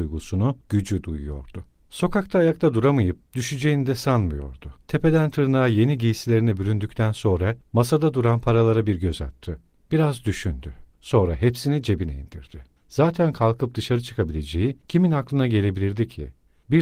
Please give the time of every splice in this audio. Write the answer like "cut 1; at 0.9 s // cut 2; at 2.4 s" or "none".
cut 1; at 4.8 s // cut 2; at 12.8 s